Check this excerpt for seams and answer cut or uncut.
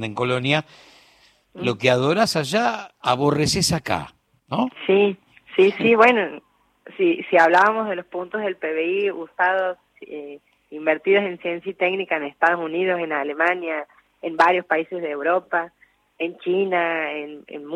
uncut